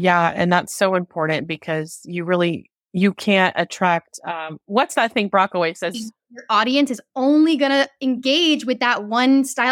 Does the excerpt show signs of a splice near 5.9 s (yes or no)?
yes